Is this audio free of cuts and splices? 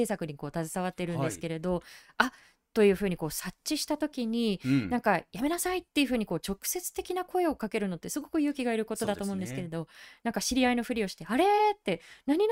yes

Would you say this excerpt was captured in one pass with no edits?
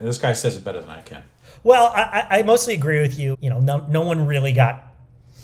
no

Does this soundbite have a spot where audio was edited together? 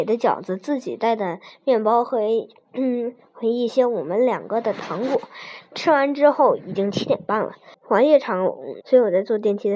yes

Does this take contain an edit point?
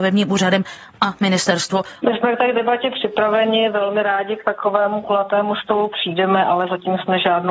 yes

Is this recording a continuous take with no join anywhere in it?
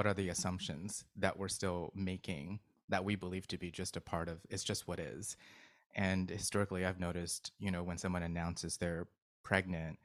yes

